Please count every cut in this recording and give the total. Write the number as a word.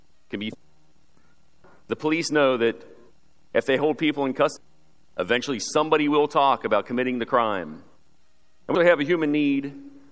one